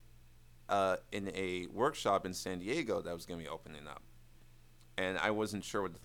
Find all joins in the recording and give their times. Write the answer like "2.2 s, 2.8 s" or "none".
none